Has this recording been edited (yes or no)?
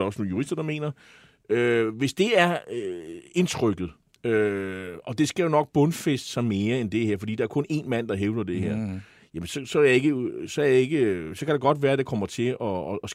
no